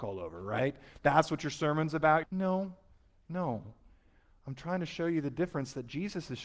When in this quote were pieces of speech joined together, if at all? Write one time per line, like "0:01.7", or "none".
0:02.2